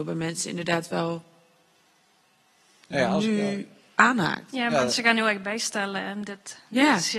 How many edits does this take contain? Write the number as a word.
zero